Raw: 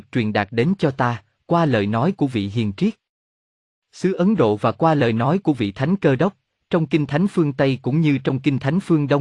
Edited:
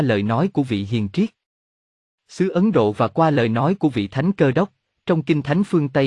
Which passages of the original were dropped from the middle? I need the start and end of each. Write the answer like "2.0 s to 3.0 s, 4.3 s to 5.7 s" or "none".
none